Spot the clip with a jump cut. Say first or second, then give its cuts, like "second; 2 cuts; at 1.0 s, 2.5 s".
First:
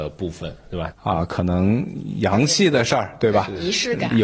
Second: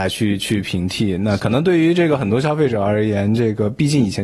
first; 1 cut; at 0.9 s